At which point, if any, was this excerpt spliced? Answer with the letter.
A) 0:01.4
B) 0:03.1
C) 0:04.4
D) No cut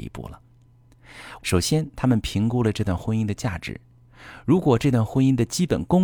A